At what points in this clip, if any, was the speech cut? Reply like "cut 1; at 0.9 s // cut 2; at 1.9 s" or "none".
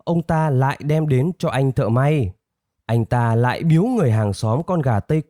cut 1; at 2.8 s